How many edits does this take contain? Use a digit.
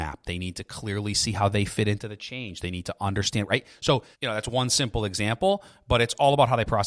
1